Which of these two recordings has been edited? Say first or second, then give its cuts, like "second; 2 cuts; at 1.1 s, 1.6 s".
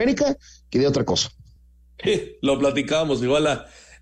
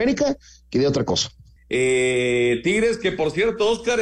second; 1 cut; at 1.6 s